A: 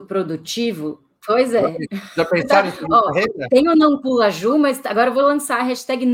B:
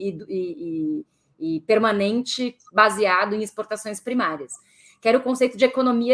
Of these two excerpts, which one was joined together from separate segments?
A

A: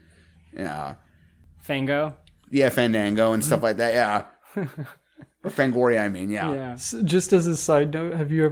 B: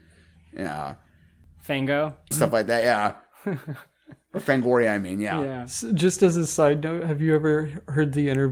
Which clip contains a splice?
B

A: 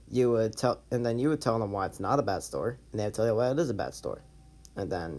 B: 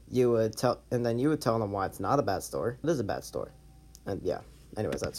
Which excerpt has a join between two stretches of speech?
B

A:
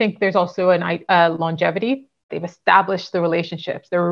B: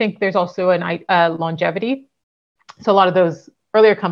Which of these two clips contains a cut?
A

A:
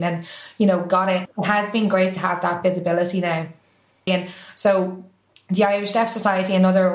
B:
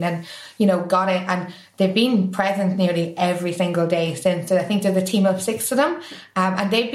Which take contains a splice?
A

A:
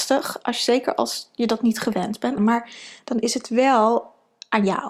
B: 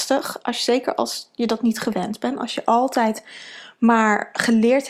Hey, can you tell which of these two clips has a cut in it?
A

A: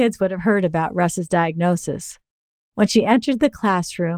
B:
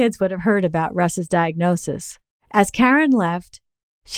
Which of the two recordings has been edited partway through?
B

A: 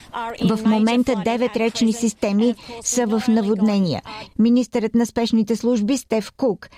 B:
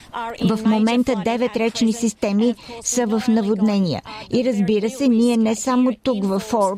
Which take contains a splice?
A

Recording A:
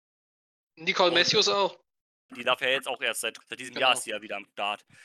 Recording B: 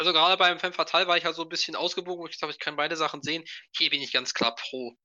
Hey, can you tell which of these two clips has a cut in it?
A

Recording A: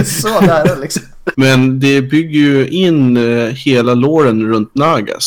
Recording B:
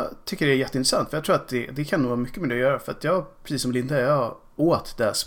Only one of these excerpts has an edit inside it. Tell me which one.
A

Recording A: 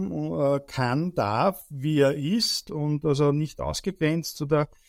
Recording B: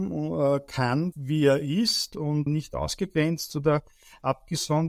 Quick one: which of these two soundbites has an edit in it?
B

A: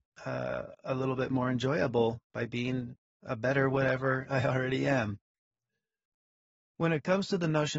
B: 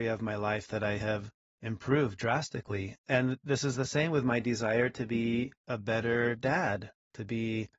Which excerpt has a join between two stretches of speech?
B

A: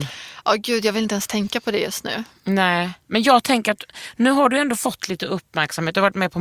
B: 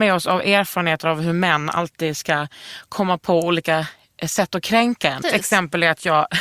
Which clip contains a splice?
B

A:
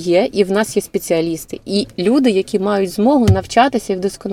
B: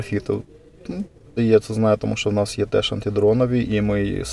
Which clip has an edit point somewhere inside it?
B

